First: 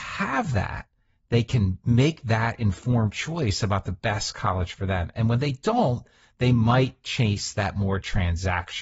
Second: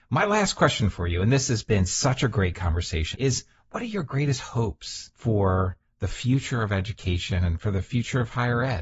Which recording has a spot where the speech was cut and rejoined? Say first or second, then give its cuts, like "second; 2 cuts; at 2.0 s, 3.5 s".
second; 2 cuts; at 3.1 s, 5.1 s